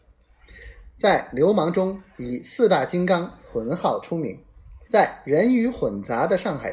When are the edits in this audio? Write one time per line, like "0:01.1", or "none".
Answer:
0:04.9